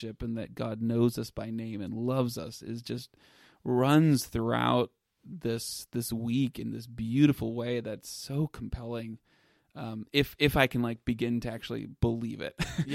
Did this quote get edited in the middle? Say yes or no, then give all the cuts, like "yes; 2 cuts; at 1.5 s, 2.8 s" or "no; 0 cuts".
no; 0 cuts